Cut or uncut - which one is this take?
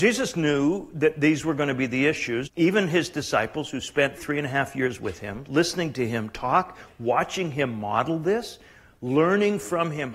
cut